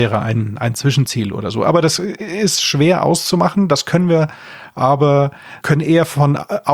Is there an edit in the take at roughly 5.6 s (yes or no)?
yes